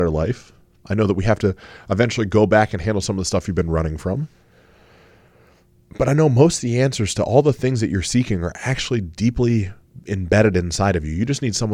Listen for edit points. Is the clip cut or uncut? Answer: uncut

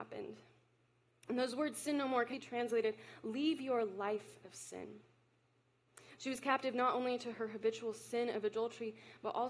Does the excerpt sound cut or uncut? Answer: cut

